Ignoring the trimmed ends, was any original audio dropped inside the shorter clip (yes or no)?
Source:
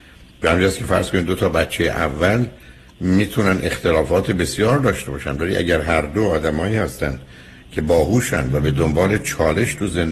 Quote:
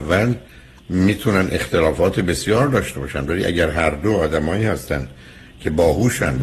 no